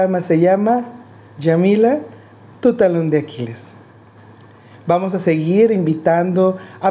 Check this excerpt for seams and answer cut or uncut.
uncut